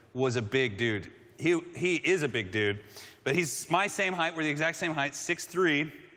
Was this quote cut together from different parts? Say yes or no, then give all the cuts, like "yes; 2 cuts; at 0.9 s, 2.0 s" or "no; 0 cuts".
no; 0 cuts